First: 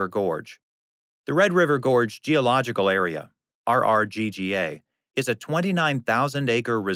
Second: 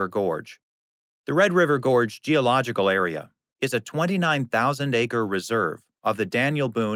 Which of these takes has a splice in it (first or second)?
second